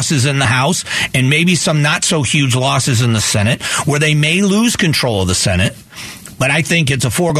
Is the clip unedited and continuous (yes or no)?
yes